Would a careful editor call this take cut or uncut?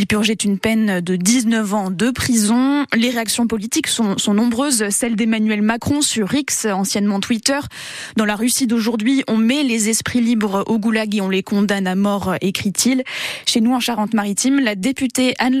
uncut